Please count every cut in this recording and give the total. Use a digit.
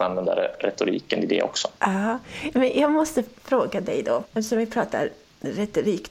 2